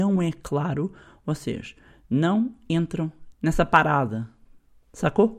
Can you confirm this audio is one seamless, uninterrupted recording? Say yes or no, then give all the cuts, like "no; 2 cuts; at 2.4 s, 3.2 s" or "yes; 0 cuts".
no; 1 cut; at 3.3 s